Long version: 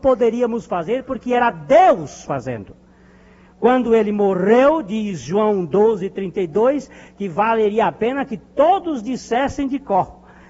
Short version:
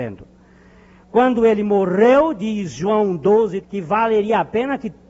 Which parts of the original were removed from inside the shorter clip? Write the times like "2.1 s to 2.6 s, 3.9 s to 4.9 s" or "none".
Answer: 6.1 s to 7.1 s